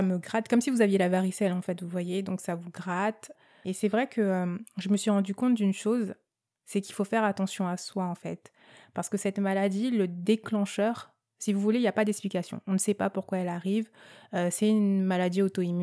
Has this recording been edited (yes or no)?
no